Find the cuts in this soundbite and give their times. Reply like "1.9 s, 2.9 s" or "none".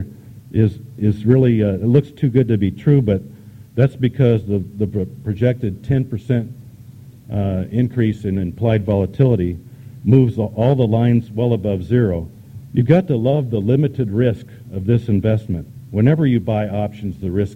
12.7 s